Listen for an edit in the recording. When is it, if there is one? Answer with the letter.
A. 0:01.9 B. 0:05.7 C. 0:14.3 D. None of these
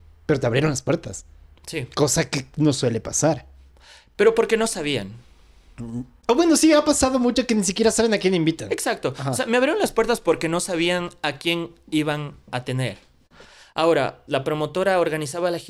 C